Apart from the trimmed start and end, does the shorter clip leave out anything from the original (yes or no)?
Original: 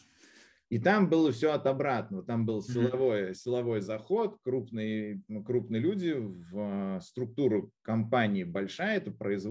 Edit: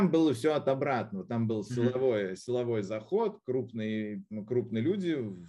no